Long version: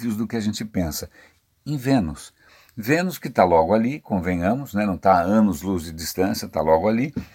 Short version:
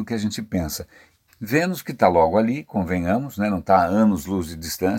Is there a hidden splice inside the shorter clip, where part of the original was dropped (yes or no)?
yes